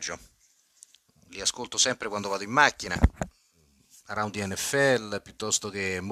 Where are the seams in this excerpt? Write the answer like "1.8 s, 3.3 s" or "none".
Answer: none